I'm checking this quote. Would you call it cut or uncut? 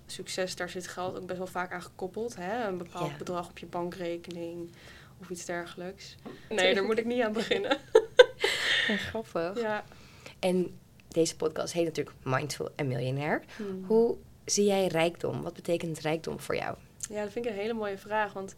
cut